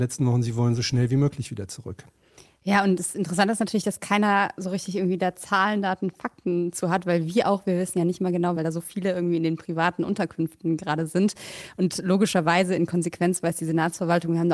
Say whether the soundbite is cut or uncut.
cut